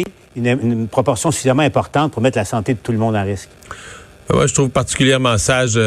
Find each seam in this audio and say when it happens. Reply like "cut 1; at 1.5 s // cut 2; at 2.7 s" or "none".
none